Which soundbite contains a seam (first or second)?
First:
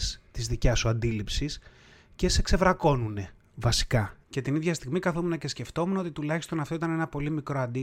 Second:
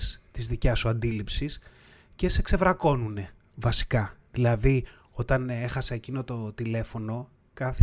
first